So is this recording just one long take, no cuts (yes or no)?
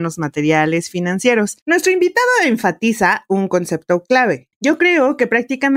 no